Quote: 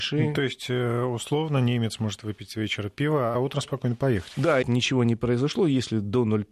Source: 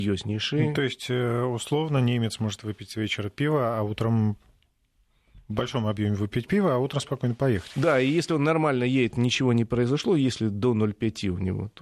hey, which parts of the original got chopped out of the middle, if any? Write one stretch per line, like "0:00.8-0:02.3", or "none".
0:03.7-0:06.7
0:08.0-0:09.1